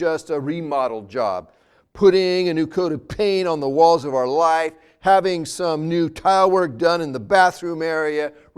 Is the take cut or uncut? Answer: uncut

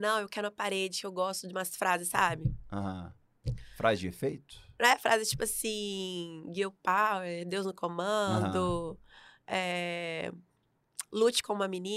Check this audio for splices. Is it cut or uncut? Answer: uncut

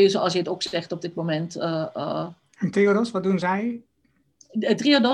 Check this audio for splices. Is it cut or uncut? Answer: uncut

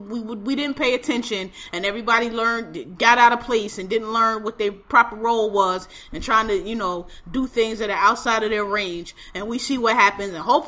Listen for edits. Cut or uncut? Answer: uncut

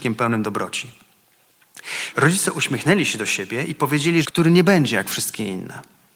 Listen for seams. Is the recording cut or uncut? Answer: cut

